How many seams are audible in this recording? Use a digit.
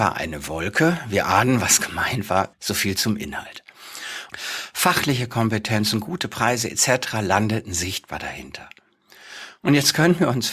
2